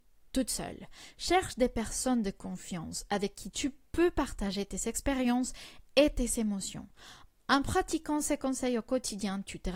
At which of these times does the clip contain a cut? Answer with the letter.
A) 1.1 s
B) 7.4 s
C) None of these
B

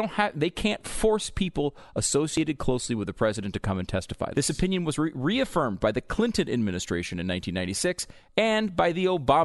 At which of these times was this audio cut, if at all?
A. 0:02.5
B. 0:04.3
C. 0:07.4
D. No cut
B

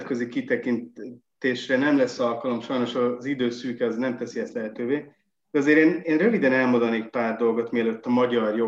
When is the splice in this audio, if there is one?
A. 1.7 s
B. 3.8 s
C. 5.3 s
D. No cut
D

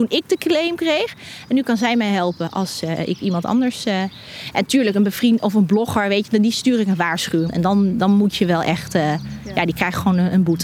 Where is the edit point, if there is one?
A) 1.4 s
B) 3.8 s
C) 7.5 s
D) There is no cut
C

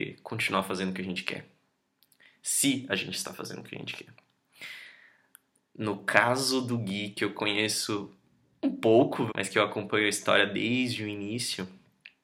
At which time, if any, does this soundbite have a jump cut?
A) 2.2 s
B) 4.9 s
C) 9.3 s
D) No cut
C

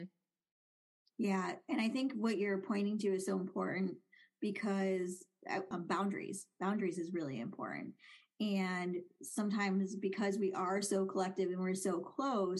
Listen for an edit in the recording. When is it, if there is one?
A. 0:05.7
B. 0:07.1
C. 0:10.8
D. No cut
A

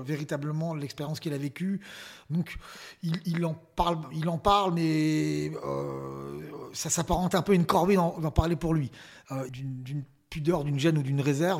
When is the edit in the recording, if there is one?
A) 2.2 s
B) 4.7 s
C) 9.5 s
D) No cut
C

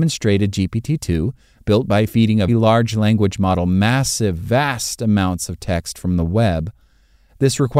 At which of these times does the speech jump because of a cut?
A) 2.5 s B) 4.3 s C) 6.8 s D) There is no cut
A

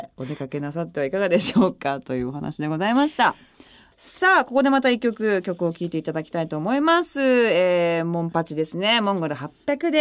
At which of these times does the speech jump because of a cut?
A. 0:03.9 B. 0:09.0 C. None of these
C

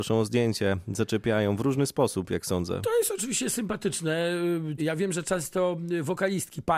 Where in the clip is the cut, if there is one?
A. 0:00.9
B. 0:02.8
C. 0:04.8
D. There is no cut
C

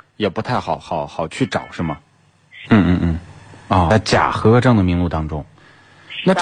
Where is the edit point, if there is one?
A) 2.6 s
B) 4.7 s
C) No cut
A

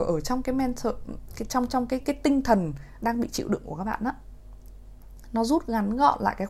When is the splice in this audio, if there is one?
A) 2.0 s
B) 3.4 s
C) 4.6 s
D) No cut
A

